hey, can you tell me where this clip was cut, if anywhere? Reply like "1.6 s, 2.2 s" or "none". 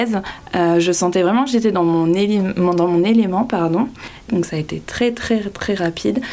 4.3 s